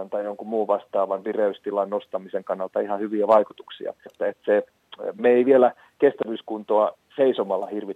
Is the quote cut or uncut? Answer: cut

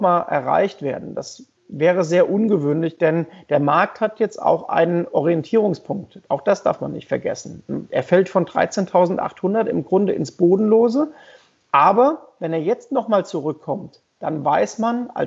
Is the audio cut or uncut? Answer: uncut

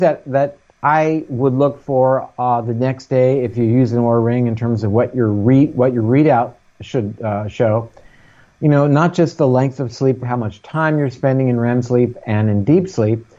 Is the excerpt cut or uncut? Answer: cut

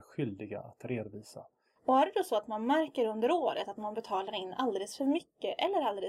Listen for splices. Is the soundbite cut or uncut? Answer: cut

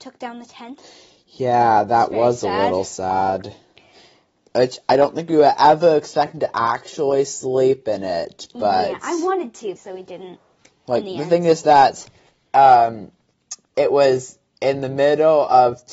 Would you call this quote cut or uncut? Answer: cut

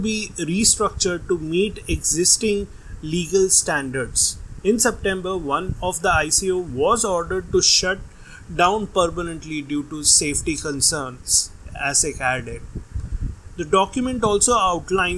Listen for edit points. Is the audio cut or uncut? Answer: uncut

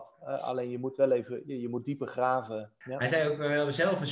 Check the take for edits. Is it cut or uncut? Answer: cut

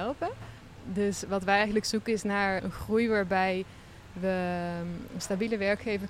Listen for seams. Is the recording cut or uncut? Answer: cut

